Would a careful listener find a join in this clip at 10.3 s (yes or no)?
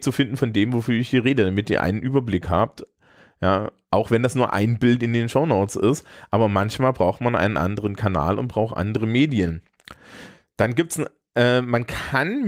no